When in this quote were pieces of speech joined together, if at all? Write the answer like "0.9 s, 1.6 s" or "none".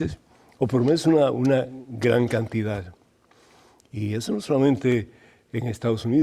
none